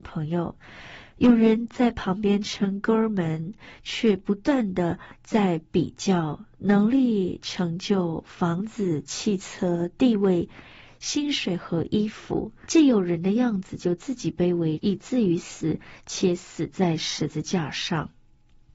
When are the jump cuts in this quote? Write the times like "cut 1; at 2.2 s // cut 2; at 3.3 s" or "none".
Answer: cut 1; at 12.7 s // cut 2; at 14.8 s